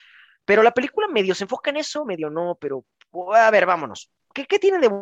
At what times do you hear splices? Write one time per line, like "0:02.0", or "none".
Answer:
none